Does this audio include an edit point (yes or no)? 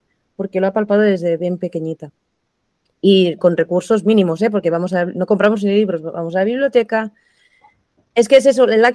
no